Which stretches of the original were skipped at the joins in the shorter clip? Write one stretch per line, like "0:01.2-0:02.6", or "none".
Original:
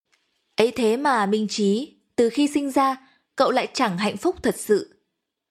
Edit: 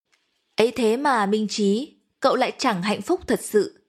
0:02.1-0:03.3